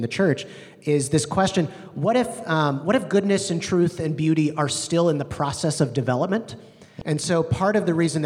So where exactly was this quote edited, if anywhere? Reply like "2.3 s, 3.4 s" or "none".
7.0 s

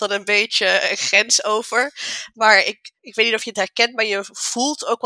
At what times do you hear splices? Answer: 3.0 s

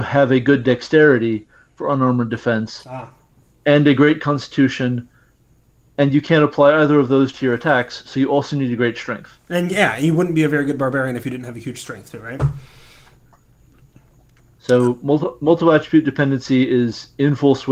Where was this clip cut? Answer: none

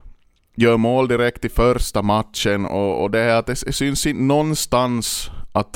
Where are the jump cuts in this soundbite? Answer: none

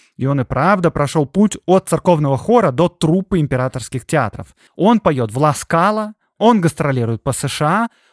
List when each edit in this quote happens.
4.7 s

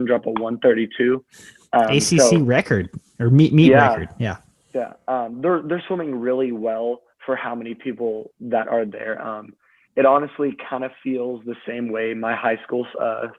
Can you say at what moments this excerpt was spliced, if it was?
none

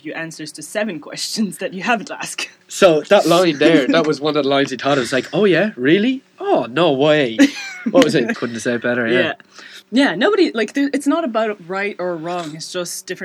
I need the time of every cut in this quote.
2.6 s, 8.3 s, 9.8 s

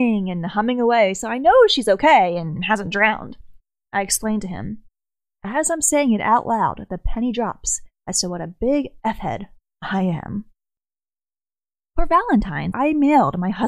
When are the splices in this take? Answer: 3.9 s, 12.7 s

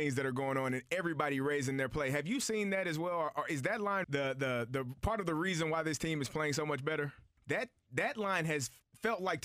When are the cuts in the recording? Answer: 4.0 s, 7.4 s

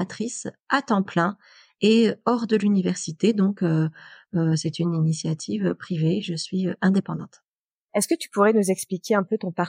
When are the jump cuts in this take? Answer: none

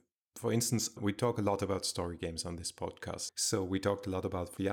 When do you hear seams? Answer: 3.3 s

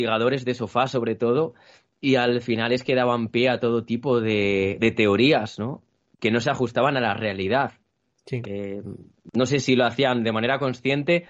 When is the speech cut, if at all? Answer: none

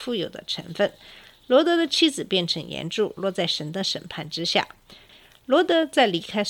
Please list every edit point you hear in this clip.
5.1 s

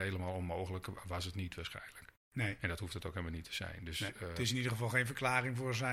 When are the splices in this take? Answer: none

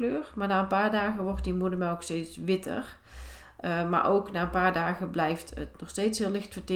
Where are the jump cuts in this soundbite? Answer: none

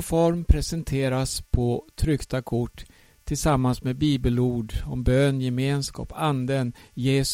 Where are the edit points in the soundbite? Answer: none

